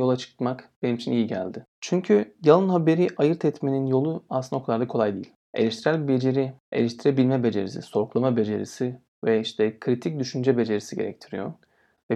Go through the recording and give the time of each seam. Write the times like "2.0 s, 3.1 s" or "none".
5.4 s